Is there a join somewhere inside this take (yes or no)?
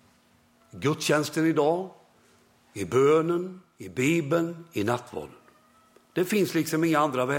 no